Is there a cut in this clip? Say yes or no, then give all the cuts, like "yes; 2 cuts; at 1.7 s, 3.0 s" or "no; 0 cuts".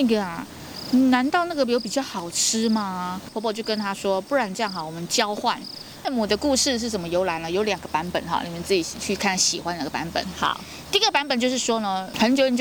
yes; 1 cut; at 6.0 s